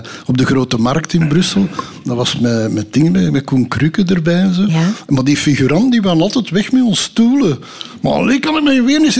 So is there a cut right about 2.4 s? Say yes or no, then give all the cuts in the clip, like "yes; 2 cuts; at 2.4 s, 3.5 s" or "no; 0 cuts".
no; 0 cuts